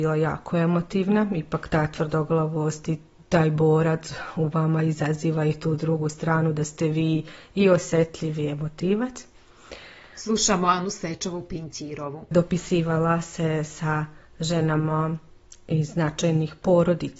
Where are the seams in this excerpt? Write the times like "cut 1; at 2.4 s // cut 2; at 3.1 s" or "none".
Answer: cut 1; at 10.1 s